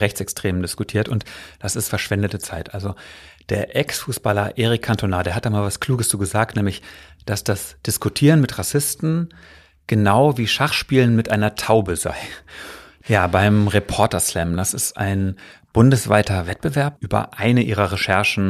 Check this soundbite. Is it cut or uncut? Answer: cut